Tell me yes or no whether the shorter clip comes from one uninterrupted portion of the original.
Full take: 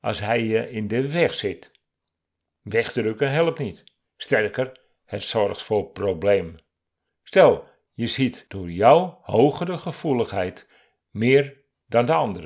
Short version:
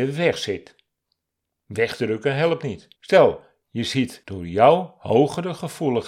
no